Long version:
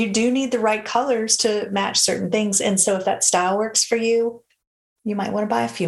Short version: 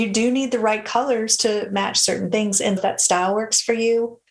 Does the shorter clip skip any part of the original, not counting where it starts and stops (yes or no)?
yes